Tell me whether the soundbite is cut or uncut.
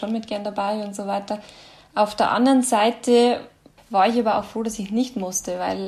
uncut